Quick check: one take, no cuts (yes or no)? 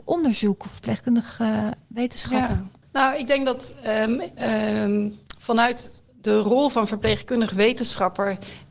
no